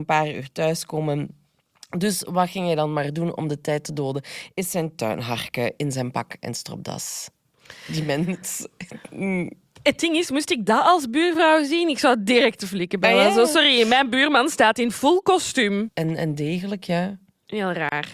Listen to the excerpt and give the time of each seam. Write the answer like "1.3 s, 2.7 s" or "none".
15.9 s